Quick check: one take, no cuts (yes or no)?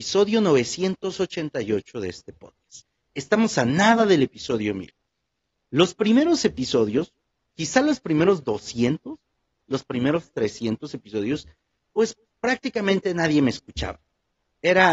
yes